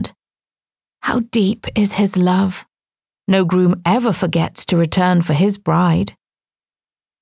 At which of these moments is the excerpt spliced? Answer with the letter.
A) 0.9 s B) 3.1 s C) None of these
B